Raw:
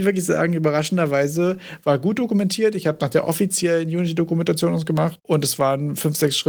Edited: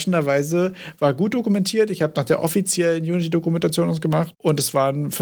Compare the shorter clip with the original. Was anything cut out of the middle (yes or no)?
no